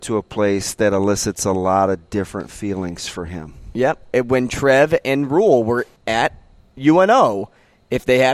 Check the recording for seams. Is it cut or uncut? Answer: cut